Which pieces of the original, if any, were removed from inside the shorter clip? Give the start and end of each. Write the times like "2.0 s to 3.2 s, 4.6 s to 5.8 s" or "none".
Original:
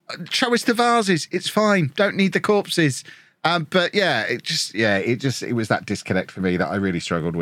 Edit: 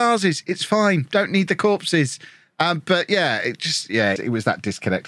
5.0 s to 5.4 s